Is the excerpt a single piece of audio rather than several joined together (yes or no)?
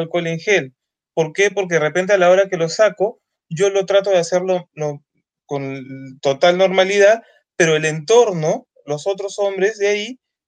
yes